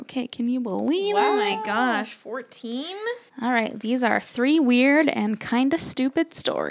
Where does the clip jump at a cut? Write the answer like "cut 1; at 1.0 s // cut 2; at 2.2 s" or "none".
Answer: cut 1; at 3.3 s